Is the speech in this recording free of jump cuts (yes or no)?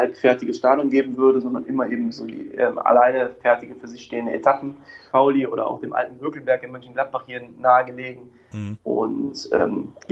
no